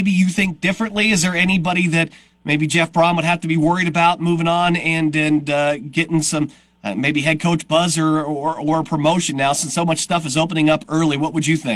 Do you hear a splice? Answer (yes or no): no